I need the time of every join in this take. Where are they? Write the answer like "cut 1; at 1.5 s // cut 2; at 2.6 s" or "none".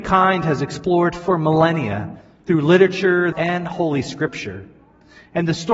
cut 1; at 3.3 s